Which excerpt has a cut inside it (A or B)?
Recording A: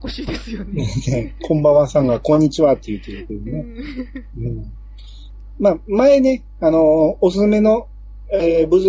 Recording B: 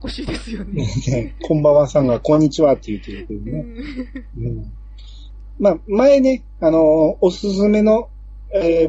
A